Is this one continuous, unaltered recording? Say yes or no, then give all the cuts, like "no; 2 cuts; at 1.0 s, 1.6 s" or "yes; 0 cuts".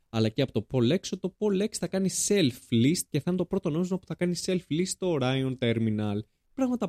yes; 0 cuts